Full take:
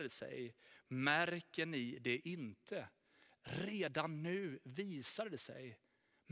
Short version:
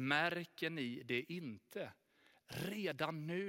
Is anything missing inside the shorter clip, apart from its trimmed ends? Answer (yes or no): no